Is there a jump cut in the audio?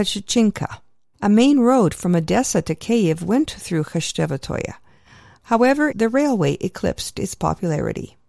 yes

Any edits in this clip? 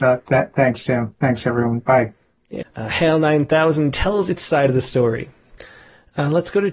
yes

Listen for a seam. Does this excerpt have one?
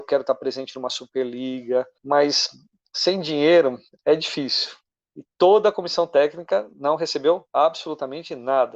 yes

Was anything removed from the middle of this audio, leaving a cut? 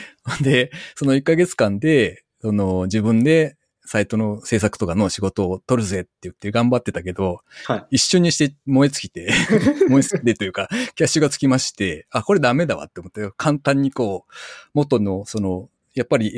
no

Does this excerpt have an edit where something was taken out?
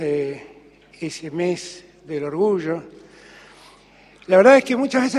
no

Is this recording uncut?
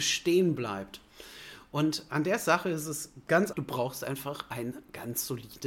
no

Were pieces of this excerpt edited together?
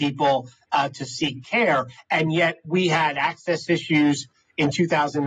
no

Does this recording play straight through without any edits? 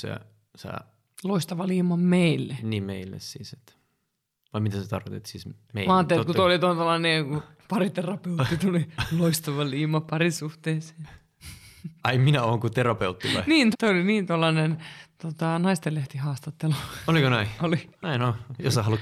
no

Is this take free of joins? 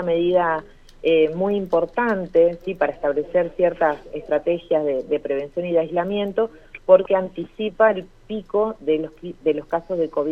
yes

